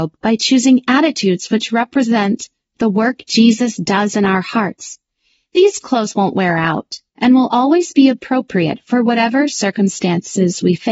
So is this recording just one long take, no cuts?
yes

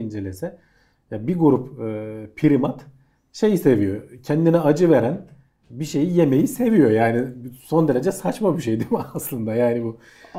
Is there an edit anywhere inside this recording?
no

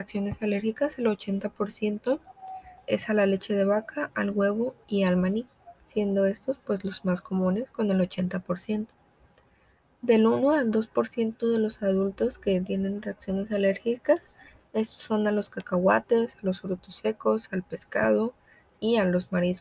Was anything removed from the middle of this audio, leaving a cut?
yes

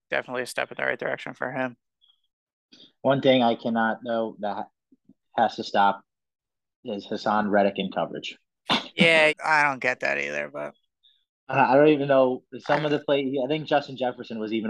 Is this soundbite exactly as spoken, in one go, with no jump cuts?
no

